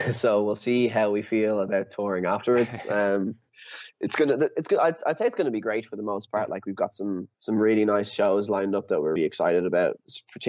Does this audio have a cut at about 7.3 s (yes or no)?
yes